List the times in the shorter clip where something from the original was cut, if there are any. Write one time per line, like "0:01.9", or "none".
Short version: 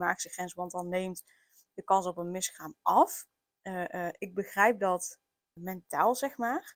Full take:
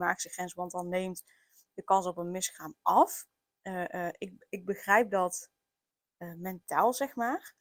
0:04.2
0:05.6